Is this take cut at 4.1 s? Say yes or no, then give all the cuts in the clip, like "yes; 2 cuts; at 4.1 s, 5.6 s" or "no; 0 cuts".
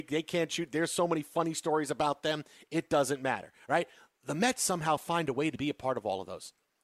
no; 0 cuts